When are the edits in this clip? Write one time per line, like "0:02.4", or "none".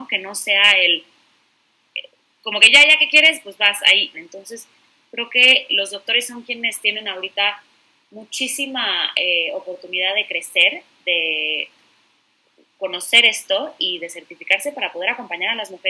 0:04.1
0:05.7